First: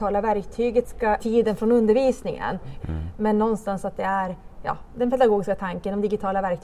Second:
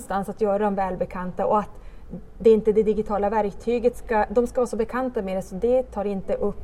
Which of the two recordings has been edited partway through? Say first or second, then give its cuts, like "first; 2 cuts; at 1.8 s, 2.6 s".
first; 2 cuts; at 1.2 s, 2.8 s